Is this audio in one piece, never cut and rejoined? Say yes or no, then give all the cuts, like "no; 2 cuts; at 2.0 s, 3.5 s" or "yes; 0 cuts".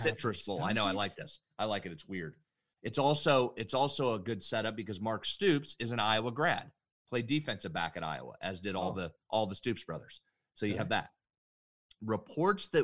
yes; 0 cuts